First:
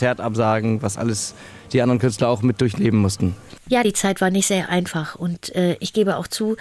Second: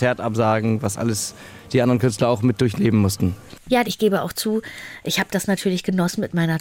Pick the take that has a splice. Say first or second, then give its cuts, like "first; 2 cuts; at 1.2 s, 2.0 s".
second; 1 cut; at 3.8 s